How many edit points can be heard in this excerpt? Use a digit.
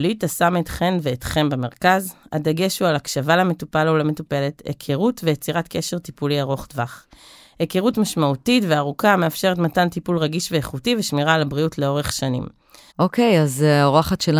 1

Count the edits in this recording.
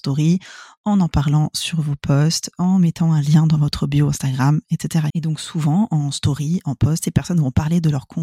2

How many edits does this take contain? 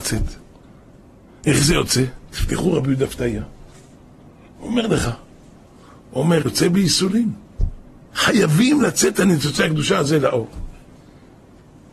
2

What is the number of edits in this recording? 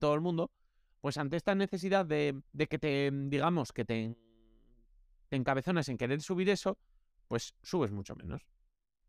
1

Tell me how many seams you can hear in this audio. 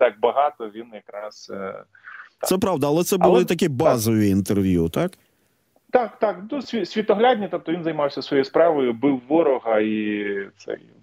1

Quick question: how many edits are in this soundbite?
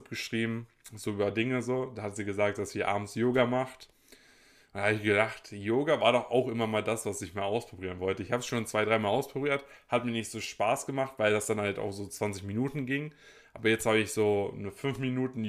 0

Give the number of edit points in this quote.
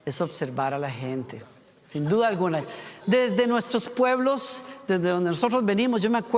0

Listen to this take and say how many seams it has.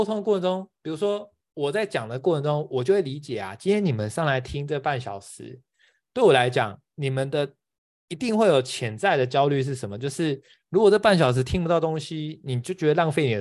0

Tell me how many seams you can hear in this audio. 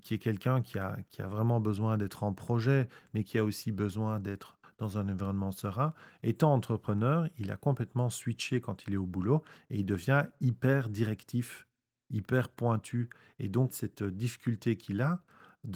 1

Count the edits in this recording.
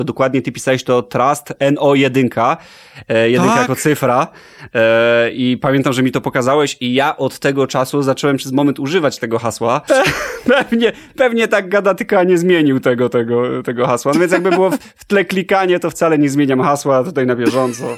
1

